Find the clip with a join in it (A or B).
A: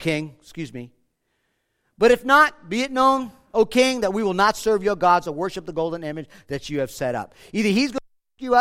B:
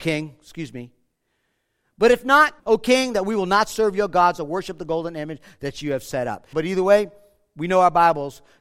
B